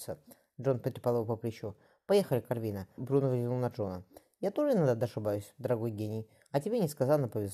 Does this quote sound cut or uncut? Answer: cut